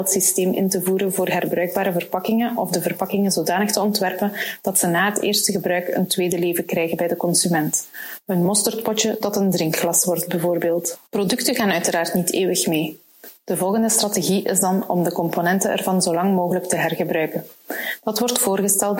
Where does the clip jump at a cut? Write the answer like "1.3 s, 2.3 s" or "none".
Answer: 11.1 s